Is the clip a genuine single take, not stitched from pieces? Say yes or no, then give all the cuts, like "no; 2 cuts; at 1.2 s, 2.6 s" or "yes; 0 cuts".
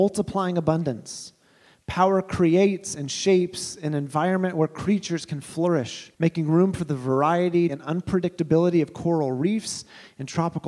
no; 2 cuts; at 6.1 s, 7.7 s